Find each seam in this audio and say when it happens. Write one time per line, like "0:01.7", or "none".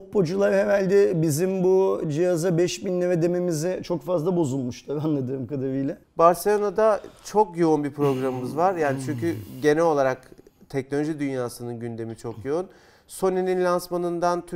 0:06.0